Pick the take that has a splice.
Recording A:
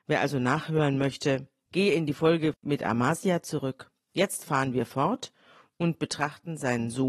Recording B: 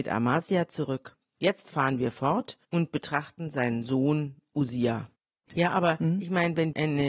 B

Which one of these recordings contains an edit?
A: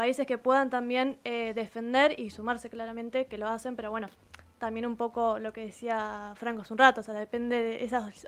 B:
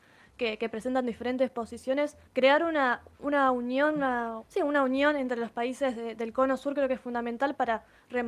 B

